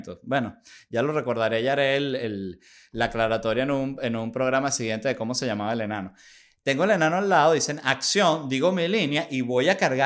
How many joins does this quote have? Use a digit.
0